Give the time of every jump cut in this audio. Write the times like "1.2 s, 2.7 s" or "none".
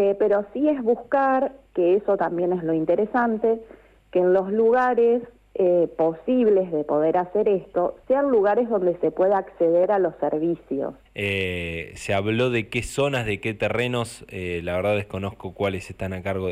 11.1 s